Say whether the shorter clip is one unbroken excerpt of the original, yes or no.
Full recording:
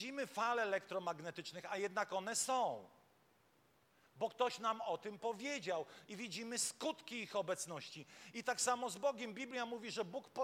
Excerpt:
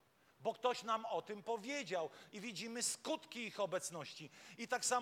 yes